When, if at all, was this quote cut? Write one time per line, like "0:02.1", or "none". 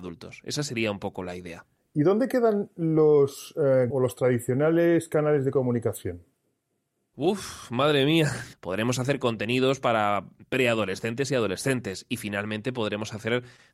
0:03.9
0:08.5

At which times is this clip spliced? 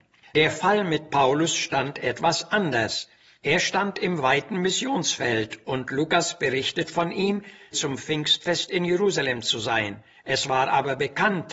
0:07.7

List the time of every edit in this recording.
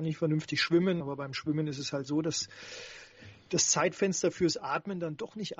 0:01.0

